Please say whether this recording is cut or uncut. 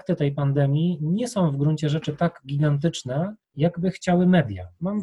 cut